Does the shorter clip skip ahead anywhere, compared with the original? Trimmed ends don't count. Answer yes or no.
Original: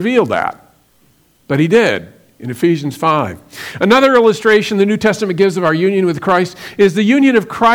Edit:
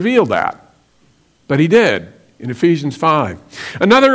no